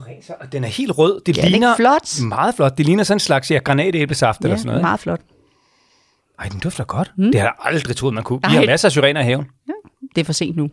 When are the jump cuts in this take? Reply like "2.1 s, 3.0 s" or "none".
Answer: none